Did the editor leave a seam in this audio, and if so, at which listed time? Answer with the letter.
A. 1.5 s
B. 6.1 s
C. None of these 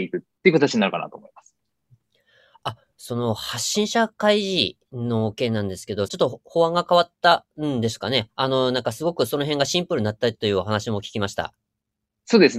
B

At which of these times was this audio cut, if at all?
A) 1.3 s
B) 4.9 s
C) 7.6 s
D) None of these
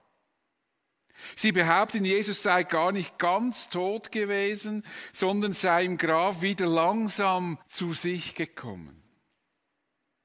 C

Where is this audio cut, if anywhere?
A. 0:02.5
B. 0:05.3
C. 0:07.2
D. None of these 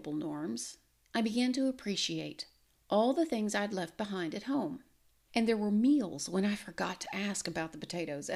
B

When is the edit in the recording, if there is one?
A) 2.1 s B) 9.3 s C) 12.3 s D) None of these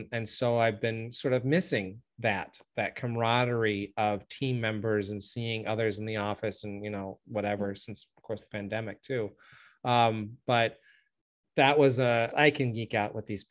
C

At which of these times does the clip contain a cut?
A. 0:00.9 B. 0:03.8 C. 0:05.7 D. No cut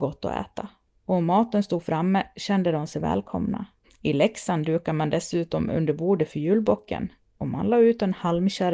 B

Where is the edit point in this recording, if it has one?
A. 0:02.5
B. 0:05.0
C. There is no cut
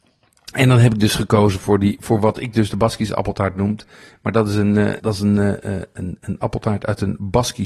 B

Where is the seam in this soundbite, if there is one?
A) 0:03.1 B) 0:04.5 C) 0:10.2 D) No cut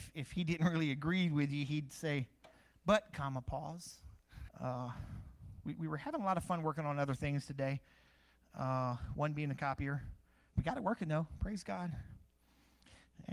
B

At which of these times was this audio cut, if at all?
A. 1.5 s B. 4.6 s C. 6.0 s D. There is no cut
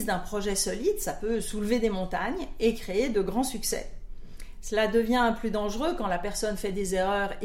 D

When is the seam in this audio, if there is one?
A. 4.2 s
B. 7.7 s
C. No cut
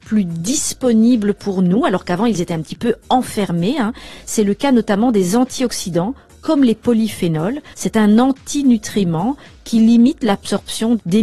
B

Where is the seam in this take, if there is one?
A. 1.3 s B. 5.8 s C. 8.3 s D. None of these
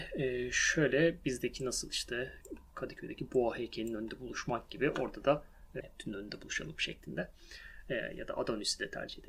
B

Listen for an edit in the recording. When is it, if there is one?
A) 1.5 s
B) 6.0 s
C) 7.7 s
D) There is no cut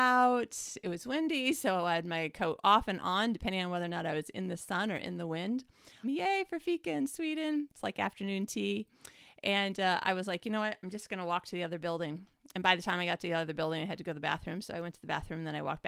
B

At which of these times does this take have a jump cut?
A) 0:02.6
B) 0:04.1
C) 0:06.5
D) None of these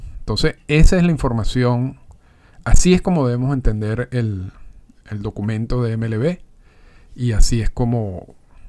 D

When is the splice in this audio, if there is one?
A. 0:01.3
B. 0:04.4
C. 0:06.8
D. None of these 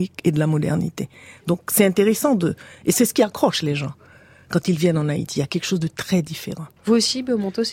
C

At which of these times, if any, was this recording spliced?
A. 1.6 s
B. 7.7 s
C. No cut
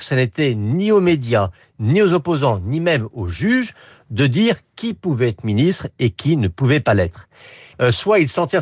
B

